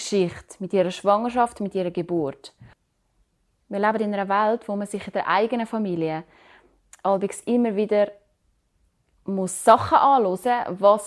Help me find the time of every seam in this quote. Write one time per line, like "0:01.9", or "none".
none